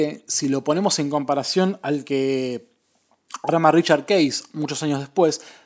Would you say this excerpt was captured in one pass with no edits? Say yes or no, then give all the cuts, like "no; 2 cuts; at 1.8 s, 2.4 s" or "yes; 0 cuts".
yes; 0 cuts